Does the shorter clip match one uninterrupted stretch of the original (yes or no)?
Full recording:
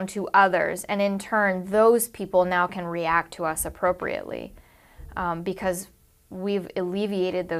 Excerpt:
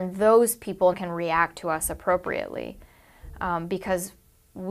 no